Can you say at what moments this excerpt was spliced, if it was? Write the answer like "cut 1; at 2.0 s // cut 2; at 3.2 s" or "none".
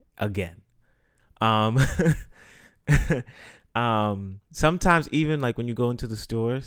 cut 1; at 4.5 s